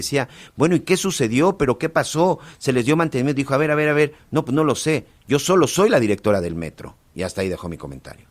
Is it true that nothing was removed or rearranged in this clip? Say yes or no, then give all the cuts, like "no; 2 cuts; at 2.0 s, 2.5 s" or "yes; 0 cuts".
yes; 0 cuts